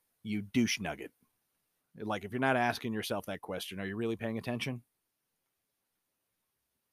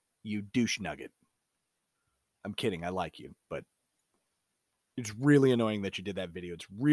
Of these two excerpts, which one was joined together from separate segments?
first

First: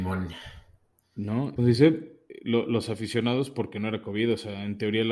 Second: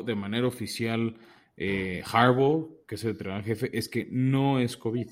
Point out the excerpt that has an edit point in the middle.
first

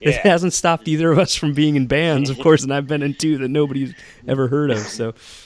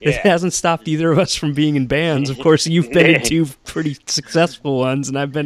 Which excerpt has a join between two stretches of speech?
first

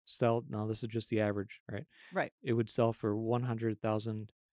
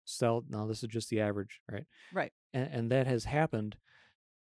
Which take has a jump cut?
second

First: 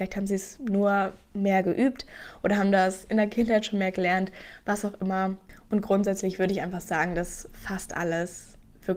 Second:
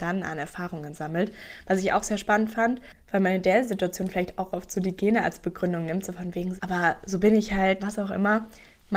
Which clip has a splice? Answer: second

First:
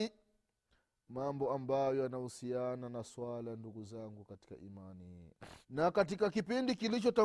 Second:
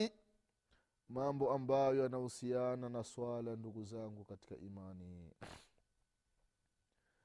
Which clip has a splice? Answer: first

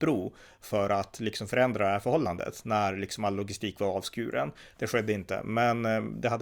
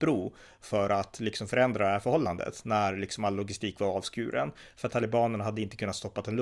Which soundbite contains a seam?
first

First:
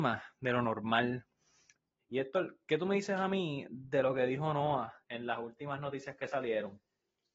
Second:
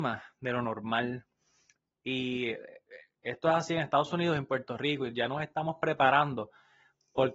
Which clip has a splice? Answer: first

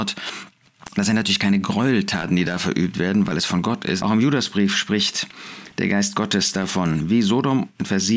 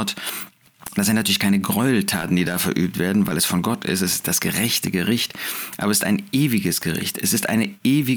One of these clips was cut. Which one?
first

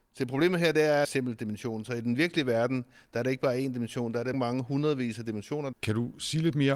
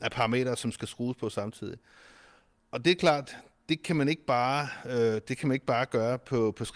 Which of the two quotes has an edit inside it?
first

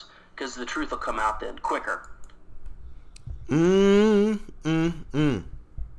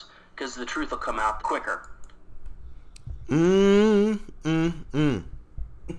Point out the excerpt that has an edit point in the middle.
second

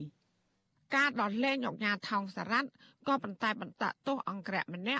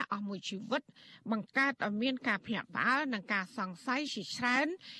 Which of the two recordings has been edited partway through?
first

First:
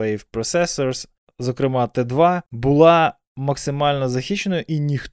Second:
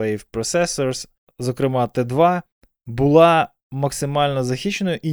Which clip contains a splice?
first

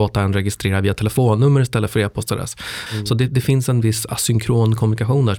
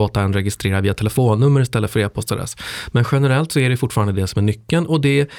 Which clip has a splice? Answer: first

